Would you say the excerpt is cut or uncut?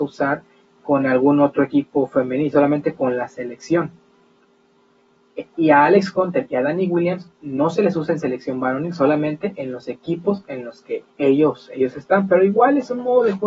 cut